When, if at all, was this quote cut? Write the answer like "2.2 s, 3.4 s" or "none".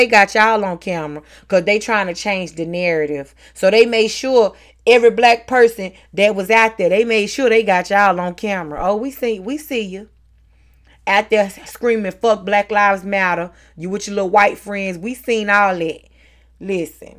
none